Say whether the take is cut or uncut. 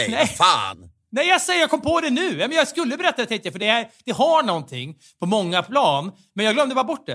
uncut